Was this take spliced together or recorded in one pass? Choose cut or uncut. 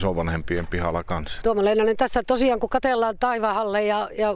cut